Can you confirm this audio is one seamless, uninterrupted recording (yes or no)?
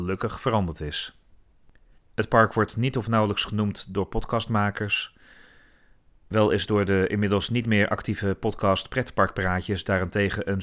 no